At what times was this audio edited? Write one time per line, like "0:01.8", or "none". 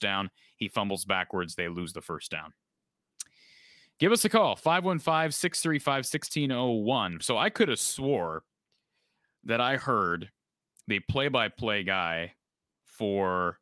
0:07.2